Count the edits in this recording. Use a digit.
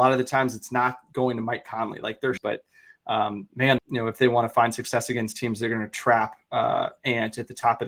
2